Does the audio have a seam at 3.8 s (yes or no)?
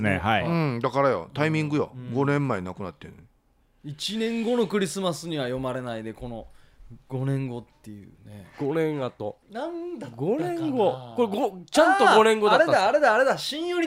no